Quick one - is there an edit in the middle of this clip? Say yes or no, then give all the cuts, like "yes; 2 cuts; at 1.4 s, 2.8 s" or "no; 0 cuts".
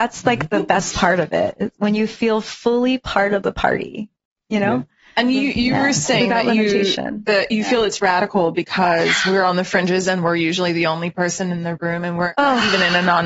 no; 0 cuts